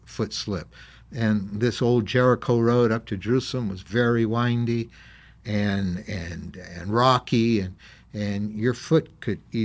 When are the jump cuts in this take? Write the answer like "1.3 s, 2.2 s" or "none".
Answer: none